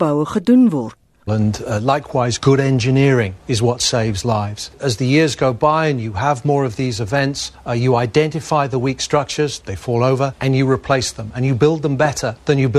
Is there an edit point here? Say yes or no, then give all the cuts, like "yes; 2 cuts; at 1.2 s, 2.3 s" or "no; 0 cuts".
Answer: yes; 1 cut; at 1.3 s